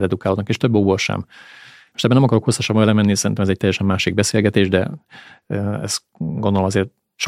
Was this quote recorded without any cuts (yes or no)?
no